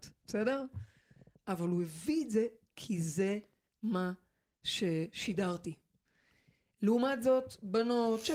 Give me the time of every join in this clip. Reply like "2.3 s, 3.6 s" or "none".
none